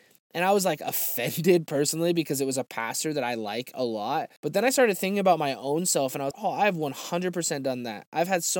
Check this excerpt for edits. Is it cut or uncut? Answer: cut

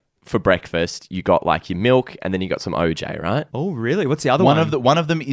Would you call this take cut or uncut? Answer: cut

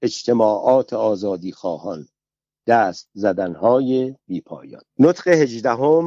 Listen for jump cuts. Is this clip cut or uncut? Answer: cut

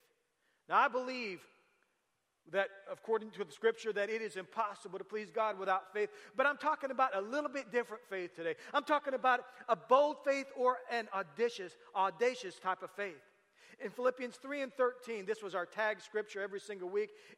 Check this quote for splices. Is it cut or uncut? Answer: uncut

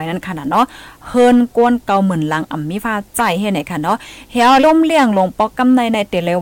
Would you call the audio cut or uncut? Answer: cut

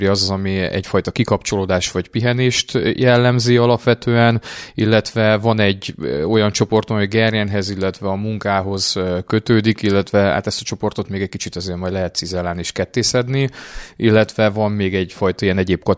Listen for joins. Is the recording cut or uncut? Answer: uncut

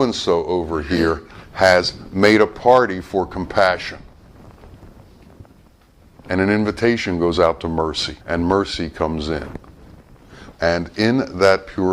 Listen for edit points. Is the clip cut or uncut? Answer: cut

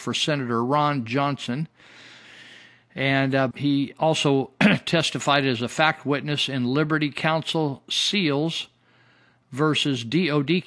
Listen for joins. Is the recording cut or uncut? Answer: cut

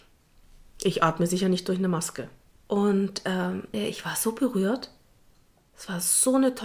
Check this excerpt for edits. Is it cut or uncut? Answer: cut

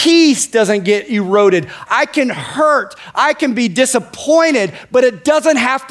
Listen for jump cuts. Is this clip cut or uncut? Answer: cut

